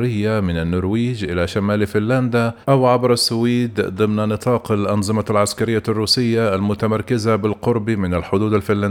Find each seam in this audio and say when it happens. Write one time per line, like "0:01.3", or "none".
0:02.6